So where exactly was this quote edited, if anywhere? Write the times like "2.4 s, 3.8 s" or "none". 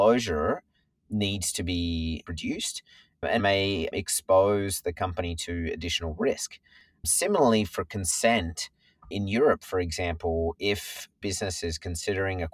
3.4 s